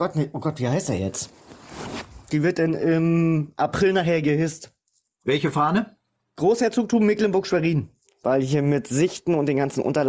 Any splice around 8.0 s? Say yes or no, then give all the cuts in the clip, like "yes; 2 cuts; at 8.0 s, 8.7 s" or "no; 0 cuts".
yes; 2 cuts; at 2.3 s, 8.0 s